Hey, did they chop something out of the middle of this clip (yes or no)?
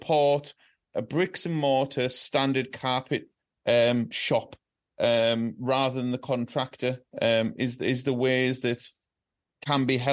no